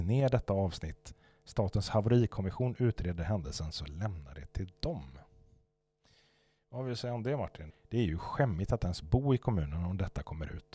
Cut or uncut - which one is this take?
cut